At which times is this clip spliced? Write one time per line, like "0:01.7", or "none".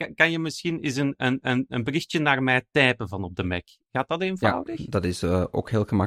none